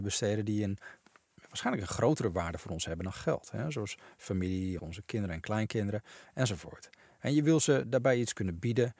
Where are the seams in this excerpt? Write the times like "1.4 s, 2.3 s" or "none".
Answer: 4.8 s